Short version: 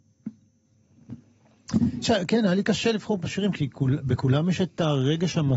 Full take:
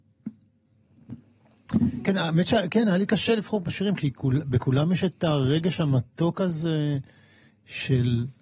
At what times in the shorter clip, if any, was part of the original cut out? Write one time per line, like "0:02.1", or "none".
0:02.0